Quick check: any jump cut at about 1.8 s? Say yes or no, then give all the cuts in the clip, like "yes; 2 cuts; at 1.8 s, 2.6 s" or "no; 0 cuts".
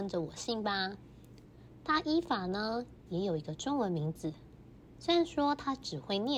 yes; 1 cut; at 1.8 s